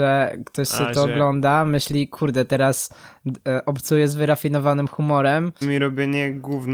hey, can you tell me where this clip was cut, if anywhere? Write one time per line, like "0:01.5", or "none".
0:05.6